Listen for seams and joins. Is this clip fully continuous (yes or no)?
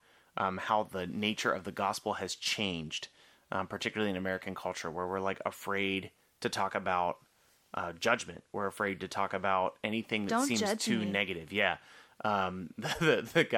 yes